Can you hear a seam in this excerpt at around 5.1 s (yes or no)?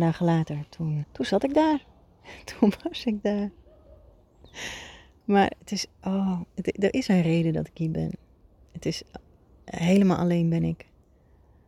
no